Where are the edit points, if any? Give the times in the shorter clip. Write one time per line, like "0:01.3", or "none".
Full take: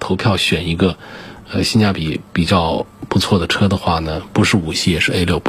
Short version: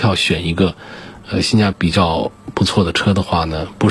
0:01.7